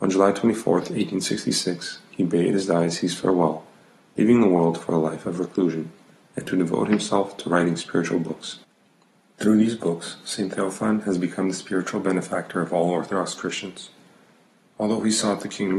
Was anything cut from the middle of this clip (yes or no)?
no